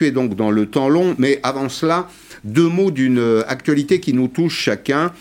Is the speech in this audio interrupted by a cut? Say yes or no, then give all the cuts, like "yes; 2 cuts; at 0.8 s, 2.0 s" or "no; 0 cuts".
no; 0 cuts